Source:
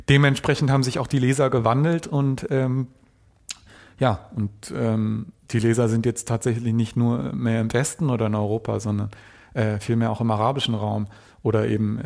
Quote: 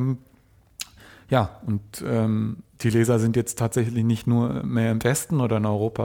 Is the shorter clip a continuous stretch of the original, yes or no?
yes